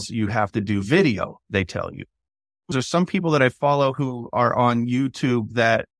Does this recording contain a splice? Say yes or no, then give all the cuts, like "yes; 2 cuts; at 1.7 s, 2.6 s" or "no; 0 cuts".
yes; 1 cut; at 2.7 s